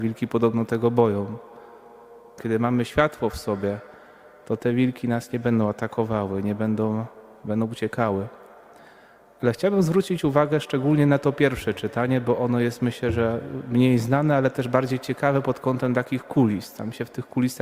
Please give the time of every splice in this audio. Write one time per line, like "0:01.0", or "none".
0:02.4